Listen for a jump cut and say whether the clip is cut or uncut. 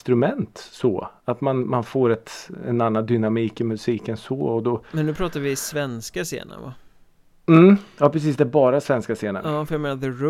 uncut